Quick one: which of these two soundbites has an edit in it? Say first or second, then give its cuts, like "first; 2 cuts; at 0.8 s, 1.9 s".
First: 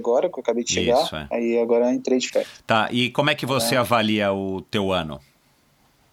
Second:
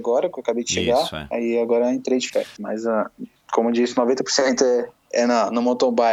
second; 1 cut; at 2.6 s